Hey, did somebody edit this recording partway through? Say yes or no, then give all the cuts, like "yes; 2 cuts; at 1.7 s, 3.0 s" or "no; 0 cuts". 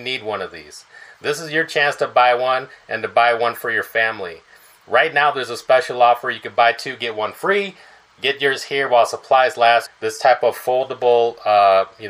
yes; 1 cut; at 9.9 s